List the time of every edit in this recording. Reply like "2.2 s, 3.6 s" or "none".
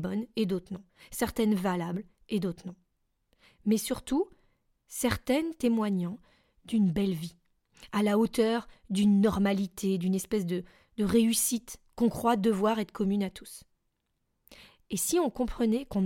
none